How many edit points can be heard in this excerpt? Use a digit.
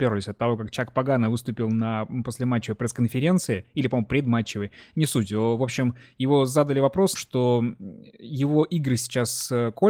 1